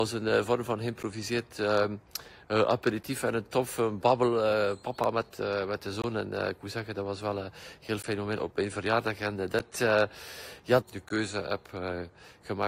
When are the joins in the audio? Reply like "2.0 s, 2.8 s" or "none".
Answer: 8.4 s, 10.8 s

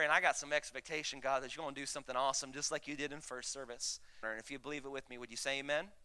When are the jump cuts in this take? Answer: 4.2 s

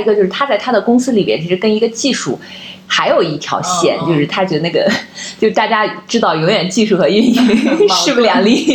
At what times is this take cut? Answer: none

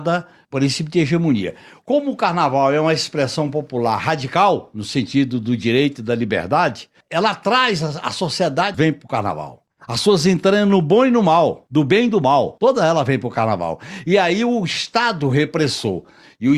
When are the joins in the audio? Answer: 8.7 s

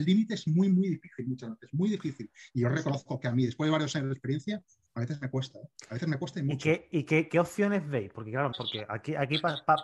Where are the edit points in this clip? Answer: 8.5 s

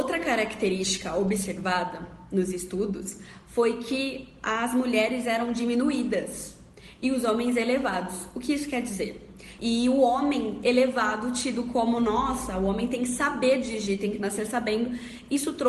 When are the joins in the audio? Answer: 9.6 s

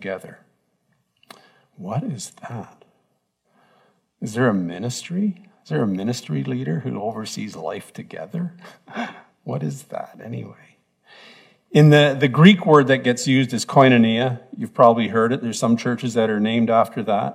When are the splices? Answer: none

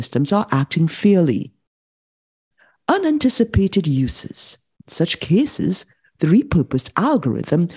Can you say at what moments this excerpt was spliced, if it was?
4.8 s

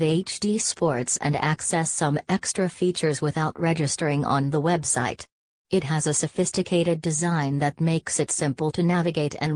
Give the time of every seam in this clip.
none

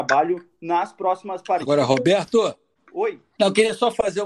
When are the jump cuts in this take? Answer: none

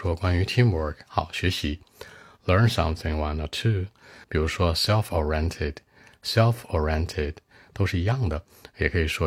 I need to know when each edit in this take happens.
4.2 s

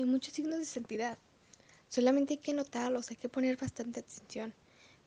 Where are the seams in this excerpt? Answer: none

